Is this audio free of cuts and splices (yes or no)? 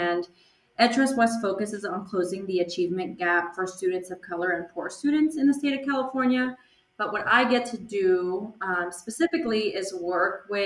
yes